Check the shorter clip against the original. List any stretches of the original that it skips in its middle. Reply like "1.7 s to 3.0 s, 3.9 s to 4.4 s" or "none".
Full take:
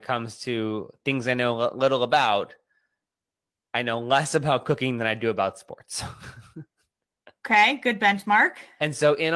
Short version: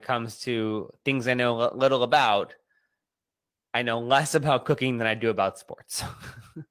none